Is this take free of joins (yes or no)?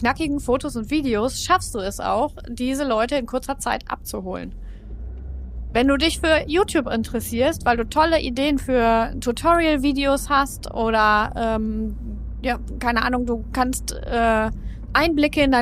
yes